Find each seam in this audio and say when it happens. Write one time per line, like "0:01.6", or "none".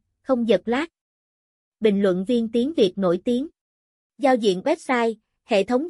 0:04.0